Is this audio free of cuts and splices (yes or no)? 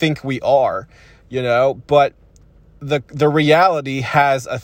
yes